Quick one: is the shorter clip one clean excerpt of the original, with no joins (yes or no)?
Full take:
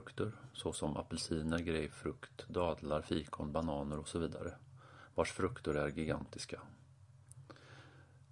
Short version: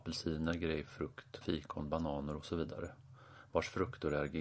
no